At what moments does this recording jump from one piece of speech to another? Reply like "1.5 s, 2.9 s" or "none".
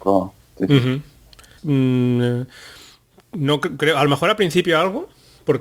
1.6 s